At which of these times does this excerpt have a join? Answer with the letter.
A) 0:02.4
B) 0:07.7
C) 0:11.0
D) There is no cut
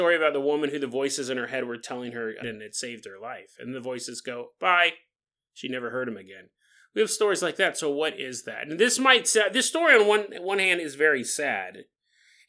A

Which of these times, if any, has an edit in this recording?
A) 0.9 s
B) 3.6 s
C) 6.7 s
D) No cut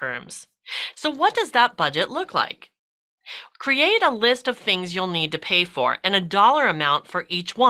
A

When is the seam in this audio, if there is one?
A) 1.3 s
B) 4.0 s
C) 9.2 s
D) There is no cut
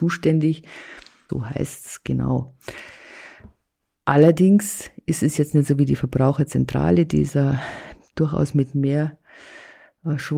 A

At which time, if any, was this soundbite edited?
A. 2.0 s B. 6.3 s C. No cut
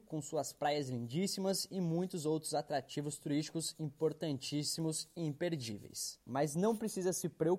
B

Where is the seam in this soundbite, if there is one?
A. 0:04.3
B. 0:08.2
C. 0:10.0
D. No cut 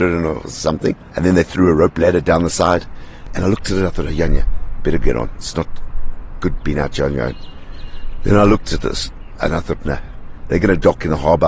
A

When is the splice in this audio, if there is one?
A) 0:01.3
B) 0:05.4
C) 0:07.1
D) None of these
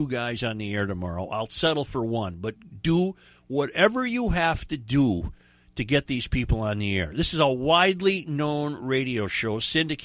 D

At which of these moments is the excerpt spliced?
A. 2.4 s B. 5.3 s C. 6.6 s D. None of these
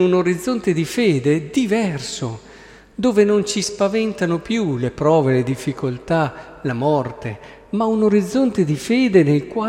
D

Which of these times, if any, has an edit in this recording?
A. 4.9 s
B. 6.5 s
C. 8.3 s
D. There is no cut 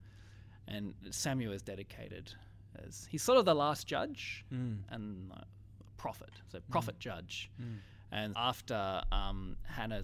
C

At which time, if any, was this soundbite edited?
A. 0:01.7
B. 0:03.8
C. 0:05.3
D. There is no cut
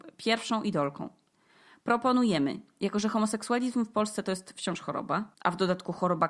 C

